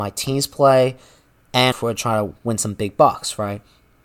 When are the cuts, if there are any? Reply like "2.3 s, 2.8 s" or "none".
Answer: 1.7 s